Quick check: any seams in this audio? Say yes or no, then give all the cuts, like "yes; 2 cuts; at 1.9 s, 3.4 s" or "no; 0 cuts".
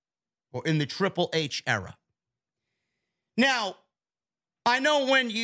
no; 0 cuts